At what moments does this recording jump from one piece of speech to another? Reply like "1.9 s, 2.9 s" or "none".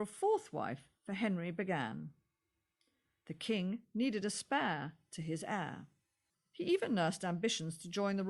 6.3 s